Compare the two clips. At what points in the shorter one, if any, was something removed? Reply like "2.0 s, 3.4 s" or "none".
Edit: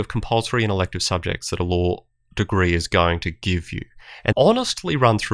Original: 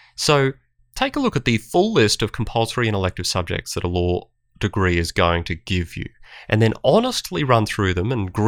4.3 s